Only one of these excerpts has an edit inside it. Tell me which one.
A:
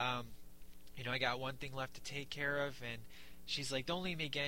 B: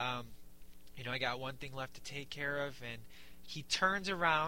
B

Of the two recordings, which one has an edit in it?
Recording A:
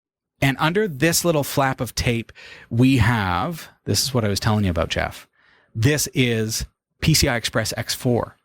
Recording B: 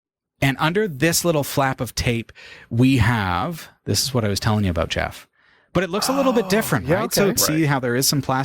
B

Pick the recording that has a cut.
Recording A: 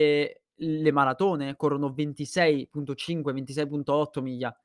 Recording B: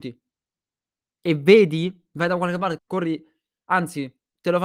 B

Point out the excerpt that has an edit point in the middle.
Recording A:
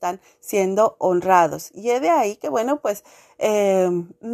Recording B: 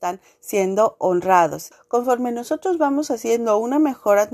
B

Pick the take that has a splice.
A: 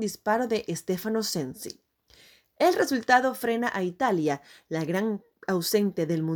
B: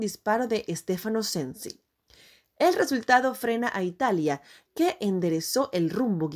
B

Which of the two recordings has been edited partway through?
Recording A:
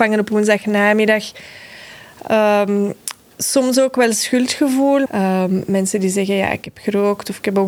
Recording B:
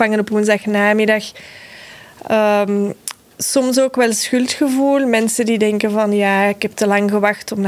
A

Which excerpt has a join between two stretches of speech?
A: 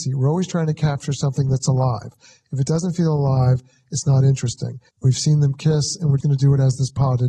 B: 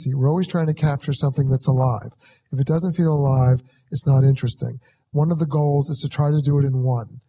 A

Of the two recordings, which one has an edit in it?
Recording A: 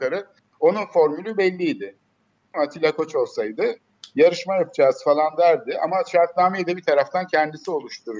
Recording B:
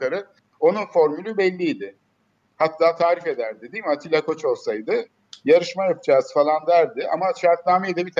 A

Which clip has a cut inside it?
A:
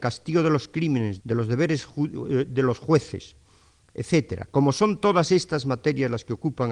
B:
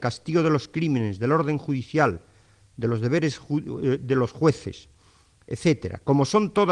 A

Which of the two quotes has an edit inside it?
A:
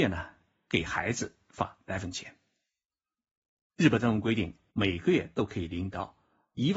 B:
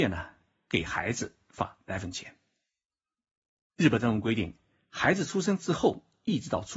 A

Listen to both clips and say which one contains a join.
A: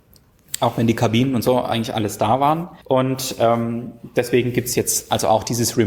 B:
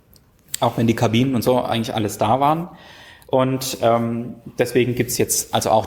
A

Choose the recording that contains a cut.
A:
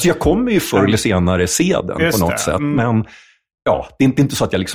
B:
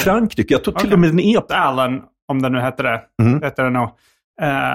B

